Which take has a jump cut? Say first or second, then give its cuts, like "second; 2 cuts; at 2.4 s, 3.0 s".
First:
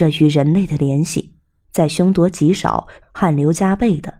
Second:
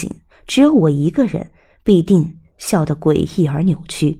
first; 2 cuts; at 1.6 s, 3.0 s